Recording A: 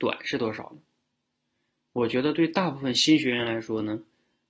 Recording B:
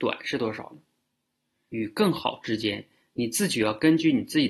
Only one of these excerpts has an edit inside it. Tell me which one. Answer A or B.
B